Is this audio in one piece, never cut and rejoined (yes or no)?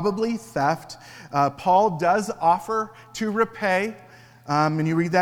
yes